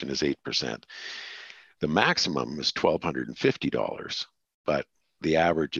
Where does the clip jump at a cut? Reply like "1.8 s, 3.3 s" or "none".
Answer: 1.7 s

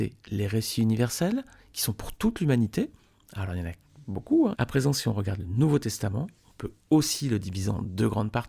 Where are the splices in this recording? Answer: 4.5 s

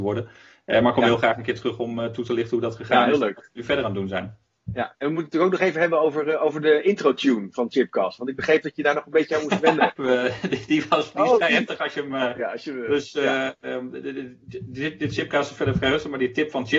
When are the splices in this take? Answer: 9.9 s, 12.4 s

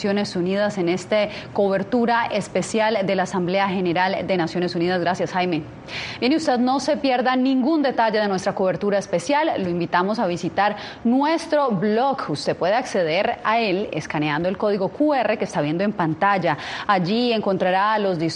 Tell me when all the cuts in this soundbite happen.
none

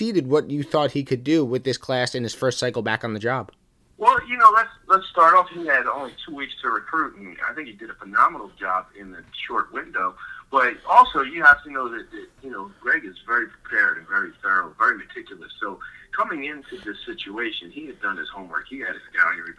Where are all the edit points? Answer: none

